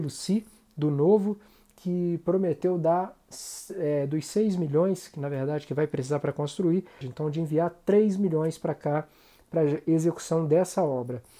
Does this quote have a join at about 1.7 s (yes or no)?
no